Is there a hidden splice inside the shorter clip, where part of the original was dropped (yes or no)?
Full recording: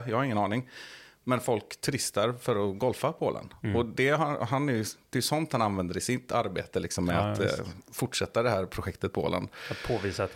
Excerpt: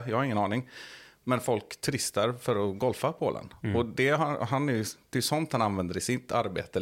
no